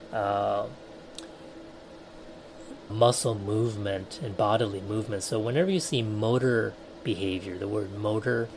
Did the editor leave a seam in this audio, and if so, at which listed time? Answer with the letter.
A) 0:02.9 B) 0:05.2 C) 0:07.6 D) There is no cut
A